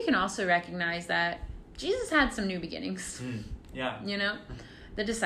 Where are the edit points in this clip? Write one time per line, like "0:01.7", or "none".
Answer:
none